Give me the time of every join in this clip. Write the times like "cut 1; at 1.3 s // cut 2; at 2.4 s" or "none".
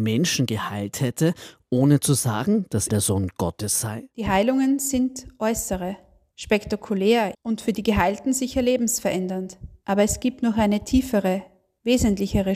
cut 1; at 2.9 s // cut 2; at 7.3 s